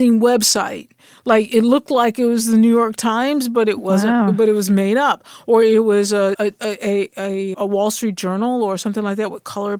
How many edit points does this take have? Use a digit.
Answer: 2